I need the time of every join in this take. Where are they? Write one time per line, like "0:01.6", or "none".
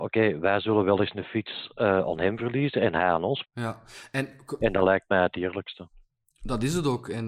0:03.4